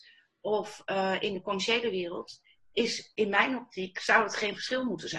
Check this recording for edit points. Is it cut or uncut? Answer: uncut